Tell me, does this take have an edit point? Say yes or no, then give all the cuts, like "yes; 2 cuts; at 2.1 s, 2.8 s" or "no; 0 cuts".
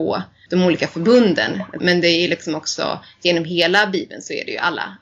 yes; 1 cut; at 1.8 s